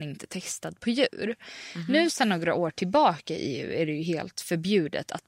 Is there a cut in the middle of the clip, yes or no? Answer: no